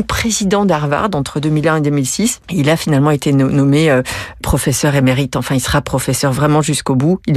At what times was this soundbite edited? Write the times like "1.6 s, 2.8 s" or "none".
none